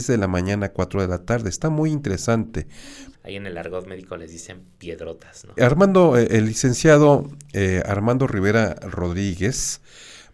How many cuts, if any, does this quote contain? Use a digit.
2